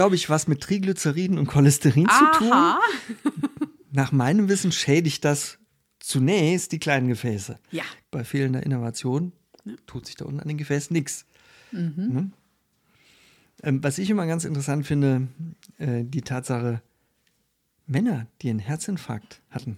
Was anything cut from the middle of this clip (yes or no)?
yes